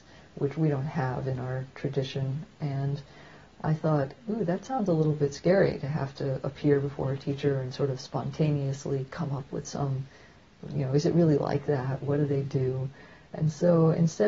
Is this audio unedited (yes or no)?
yes